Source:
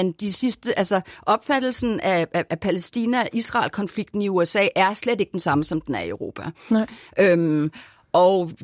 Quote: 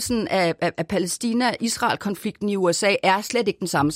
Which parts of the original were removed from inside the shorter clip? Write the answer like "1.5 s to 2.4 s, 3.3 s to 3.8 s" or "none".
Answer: none